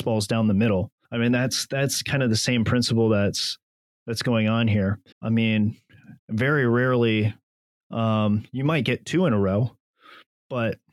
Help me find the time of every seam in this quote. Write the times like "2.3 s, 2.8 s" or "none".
1.0 s, 5.1 s, 6.2 s

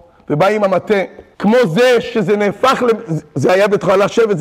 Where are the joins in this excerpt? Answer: 1.3 s

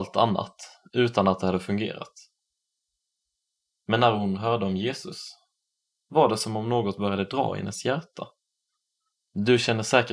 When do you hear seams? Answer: 9.1 s

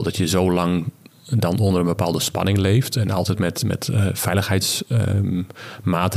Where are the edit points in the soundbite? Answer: none

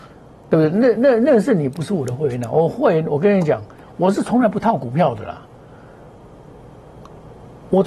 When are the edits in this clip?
none

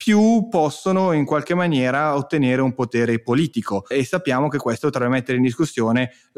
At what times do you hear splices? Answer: 3.9 s

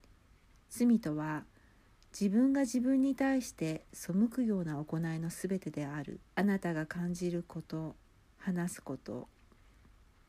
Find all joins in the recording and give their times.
6.3 s, 8.2 s

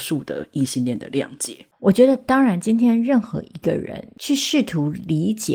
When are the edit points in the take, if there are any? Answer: 1.7 s

